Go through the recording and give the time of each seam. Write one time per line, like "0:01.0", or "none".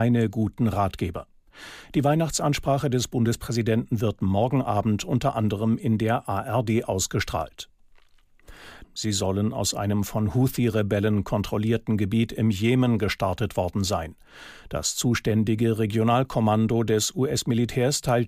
0:08.8